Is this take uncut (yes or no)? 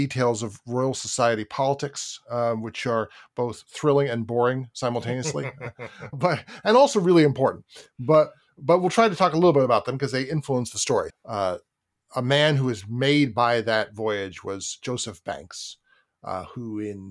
no